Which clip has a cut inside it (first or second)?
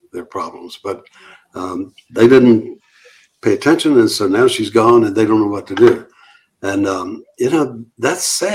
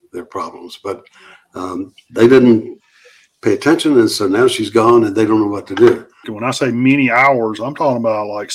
second